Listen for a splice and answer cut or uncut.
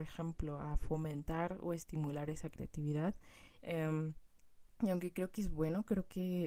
cut